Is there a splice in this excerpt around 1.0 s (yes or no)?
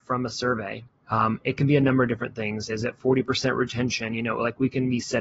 yes